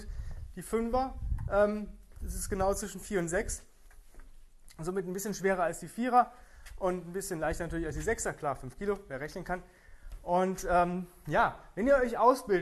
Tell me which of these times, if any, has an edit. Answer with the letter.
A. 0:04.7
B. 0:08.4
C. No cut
C